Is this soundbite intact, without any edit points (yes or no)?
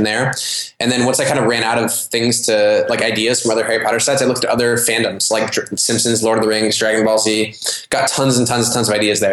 yes